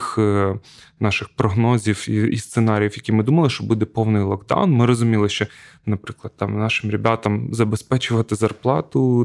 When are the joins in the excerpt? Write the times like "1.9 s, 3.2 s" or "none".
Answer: none